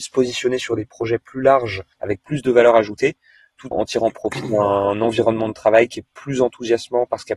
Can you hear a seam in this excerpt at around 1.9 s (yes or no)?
yes